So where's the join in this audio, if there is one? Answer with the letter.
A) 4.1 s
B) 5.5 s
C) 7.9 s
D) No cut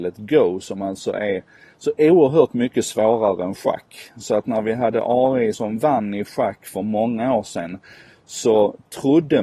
B